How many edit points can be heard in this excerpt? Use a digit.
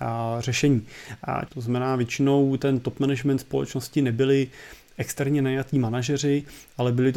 1